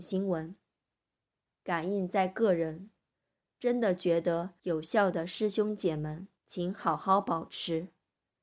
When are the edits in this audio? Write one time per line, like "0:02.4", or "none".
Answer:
0:06.4